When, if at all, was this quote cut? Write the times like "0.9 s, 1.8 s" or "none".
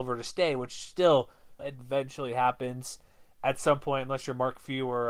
1.6 s